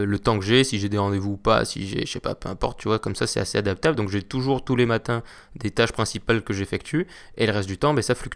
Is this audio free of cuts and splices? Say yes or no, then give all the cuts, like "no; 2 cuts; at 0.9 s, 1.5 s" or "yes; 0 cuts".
yes; 0 cuts